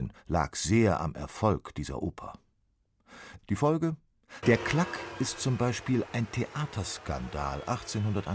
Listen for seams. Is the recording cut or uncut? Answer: cut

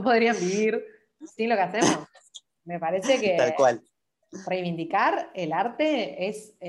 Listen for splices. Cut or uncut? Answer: uncut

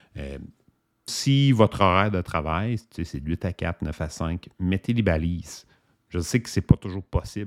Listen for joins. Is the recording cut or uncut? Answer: cut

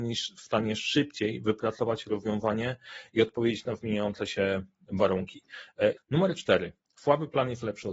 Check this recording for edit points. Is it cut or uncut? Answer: cut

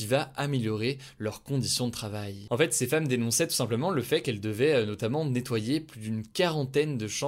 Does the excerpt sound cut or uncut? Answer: uncut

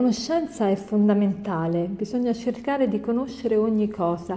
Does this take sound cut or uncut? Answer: uncut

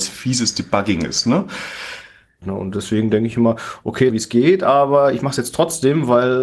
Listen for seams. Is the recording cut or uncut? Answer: cut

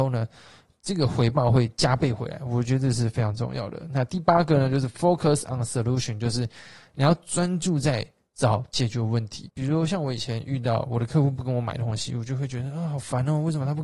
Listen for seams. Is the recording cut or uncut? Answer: cut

